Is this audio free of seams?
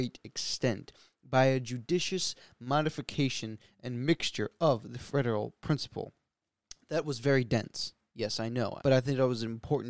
no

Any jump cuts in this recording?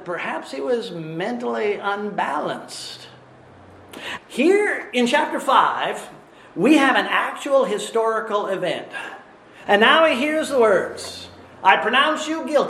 yes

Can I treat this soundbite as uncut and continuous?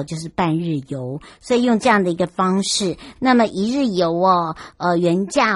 no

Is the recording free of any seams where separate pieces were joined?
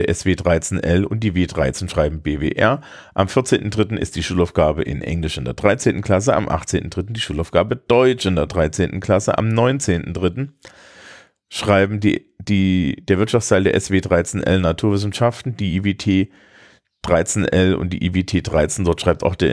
yes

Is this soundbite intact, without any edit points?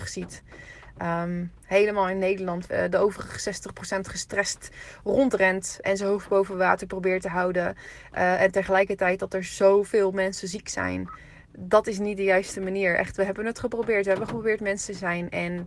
no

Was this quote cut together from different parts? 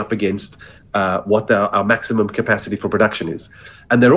no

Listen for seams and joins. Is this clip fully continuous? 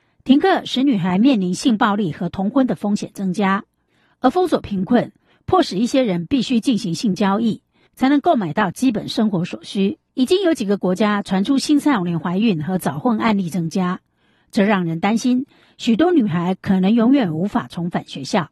no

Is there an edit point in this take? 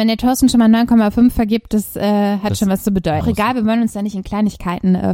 yes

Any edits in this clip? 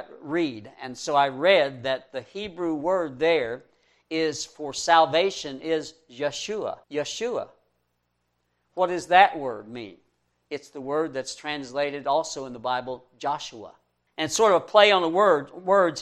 yes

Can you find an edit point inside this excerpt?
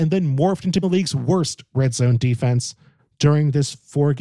no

